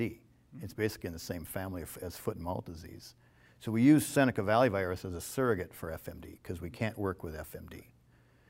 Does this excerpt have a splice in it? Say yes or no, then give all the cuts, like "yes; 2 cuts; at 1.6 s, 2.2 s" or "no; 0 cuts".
no; 0 cuts